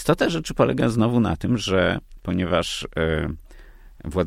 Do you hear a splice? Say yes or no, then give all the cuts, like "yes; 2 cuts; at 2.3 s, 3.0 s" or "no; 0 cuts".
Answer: no; 0 cuts